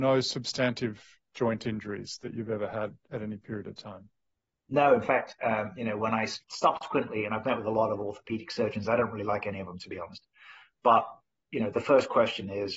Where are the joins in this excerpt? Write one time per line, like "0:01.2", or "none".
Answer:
0:06.4